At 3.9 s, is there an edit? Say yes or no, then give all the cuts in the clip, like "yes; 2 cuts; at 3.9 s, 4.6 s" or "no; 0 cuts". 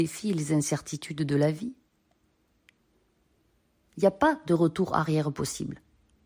yes; 1 cut; at 3.9 s